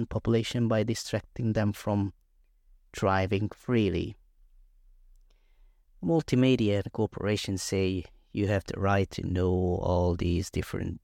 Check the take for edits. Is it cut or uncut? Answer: uncut